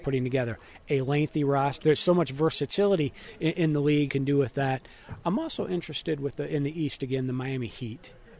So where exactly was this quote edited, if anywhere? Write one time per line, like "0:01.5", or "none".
0:01.8
0:04.1